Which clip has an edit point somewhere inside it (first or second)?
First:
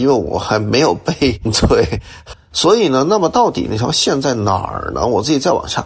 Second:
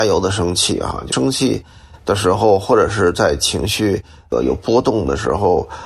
first